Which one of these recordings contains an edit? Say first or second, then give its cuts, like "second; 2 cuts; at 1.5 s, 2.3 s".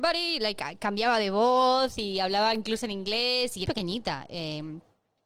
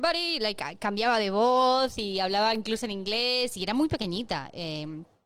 first; 1 cut; at 3.7 s